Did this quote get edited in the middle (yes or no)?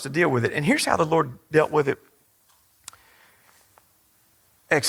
no